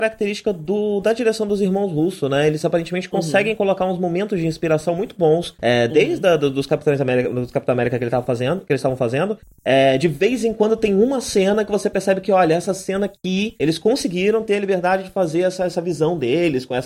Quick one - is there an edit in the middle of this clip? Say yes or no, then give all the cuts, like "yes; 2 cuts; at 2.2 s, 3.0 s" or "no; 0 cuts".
no; 0 cuts